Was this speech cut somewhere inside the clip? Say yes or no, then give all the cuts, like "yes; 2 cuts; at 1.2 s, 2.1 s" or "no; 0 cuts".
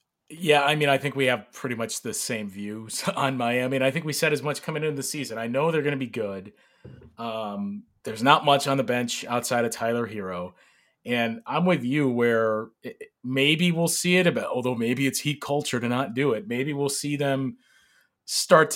no; 0 cuts